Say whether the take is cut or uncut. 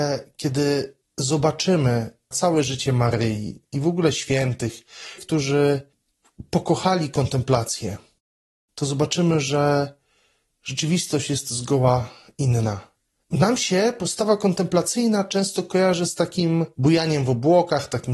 cut